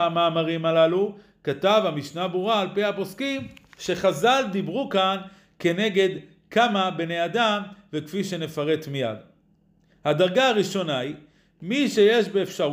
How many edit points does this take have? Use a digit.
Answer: 0